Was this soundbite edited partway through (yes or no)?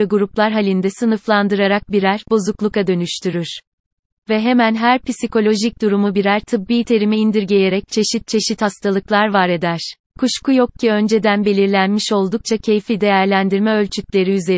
yes